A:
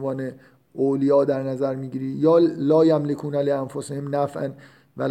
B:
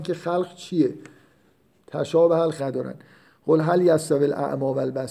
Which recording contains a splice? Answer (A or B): B